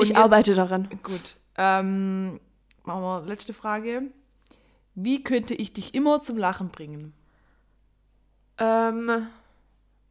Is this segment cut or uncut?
uncut